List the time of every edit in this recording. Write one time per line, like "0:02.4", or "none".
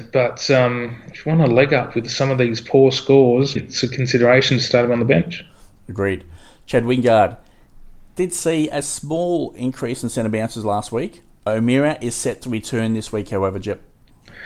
0:03.6